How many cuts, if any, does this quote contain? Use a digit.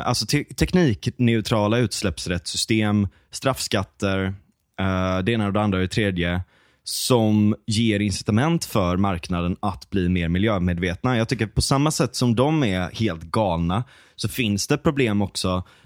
0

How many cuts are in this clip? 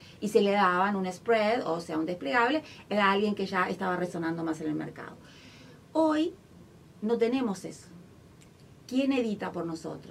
0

